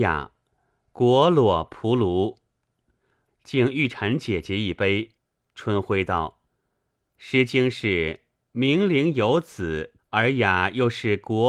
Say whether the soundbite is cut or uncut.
cut